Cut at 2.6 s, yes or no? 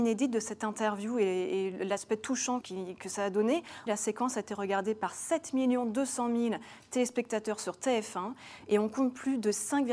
yes